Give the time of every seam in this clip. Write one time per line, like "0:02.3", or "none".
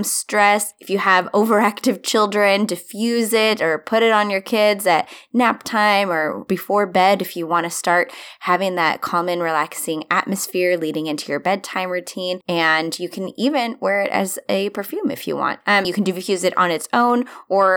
0:12.4
0:15.8